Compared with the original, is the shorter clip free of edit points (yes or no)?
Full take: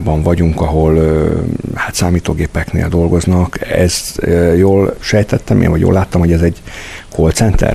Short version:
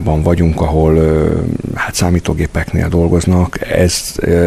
yes